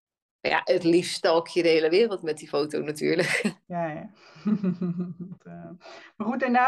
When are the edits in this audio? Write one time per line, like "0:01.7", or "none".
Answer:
0:03.6
0:05.4